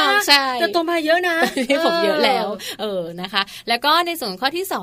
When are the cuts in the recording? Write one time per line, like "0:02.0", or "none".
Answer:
none